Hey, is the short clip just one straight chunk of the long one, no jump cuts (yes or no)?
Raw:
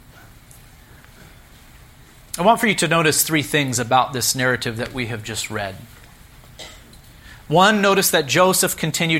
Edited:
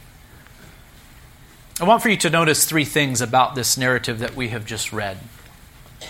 yes